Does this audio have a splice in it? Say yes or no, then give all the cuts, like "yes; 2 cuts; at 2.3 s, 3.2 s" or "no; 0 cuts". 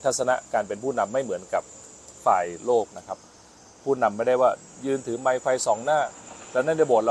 no; 0 cuts